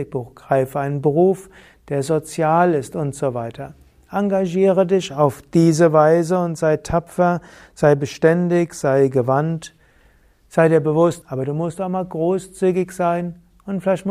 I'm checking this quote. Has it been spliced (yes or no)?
yes